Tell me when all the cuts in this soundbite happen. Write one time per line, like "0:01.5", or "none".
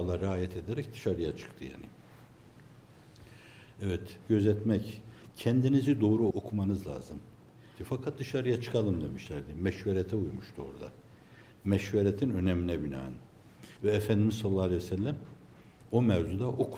0:04.3
0:07.8
0:13.8